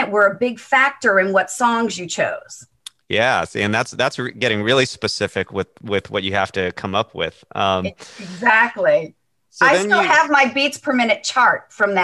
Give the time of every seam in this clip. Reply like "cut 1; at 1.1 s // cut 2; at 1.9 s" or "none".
none